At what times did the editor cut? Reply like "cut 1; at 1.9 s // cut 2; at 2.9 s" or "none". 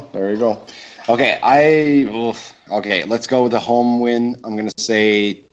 none